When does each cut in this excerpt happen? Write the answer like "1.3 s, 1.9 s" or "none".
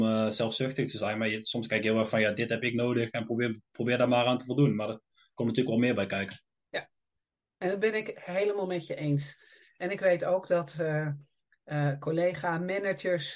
none